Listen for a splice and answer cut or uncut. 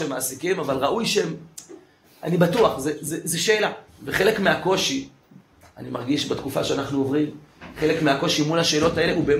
cut